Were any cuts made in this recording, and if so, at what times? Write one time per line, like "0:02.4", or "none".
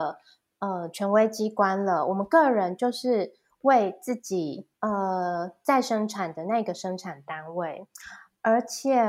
0:04.7